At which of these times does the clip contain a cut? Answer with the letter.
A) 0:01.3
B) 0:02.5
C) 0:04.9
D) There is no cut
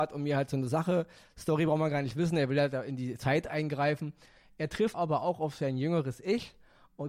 C